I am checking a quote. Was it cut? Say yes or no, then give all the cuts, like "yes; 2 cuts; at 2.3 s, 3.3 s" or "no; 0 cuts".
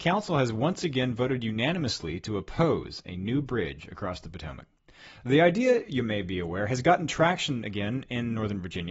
no; 0 cuts